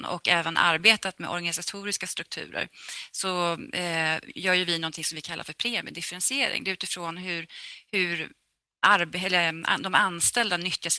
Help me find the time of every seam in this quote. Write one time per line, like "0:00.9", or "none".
none